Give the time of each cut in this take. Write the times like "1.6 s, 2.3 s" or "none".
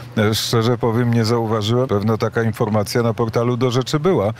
1.9 s

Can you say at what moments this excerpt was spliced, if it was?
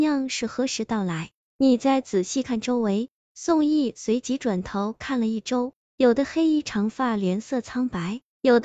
1.4 s, 2.4 s, 5.9 s

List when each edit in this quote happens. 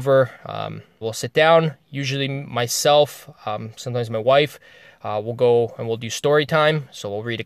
1.0 s

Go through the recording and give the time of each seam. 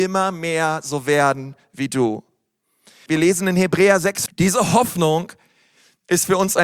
3.1 s, 4.3 s

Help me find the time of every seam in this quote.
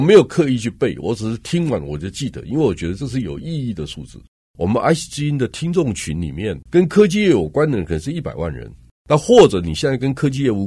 4.5 s, 6.7 s

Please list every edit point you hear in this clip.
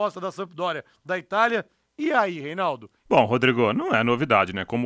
3.1 s

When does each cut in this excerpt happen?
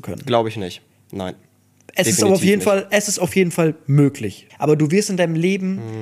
4.5 s

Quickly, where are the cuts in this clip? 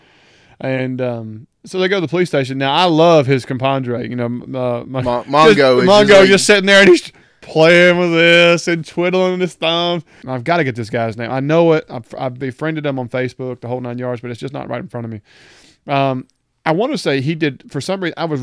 10.2 s

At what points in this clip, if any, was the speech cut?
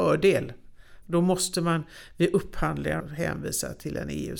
1.0 s, 3.0 s

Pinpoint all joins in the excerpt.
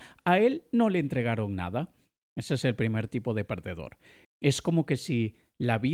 2.2 s, 4.2 s

